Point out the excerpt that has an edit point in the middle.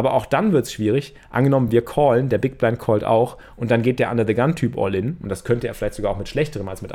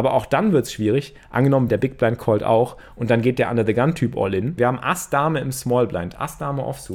second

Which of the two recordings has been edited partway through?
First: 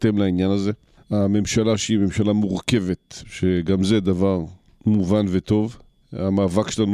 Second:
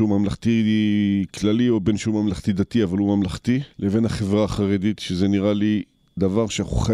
first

